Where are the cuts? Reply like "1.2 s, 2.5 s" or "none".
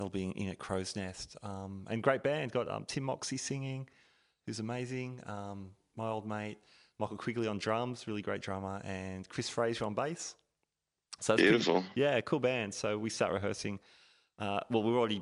none